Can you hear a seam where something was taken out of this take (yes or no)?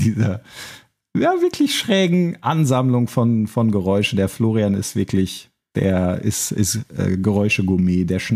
no